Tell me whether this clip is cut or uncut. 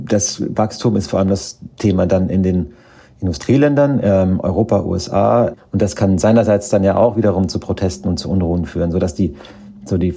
cut